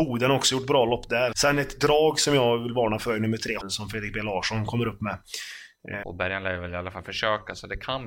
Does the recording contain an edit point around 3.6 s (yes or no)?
yes